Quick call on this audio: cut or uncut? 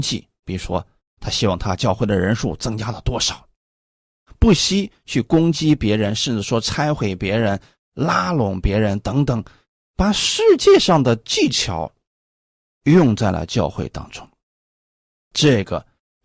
uncut